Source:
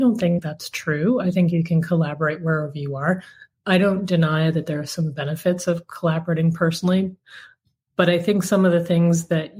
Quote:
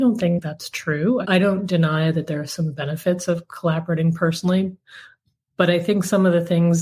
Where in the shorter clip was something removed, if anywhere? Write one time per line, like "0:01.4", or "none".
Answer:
0:01.2